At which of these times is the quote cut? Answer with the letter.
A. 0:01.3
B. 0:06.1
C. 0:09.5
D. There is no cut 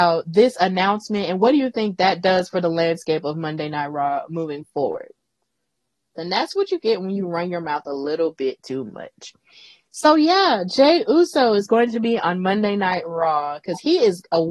B